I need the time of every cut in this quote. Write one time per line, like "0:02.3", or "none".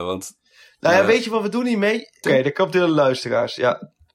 0:02.2